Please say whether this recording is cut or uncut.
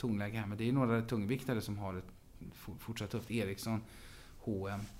uncut